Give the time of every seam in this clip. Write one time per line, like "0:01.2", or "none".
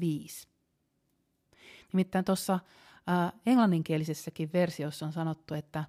0:01.8